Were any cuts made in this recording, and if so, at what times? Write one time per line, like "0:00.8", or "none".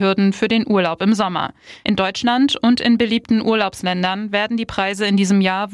0:01.8